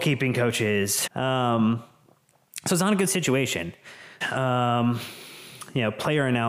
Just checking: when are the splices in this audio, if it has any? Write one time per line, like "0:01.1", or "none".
0:01.1
0:04.2